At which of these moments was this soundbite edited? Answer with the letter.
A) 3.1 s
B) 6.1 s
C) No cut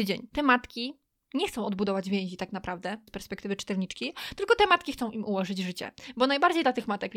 A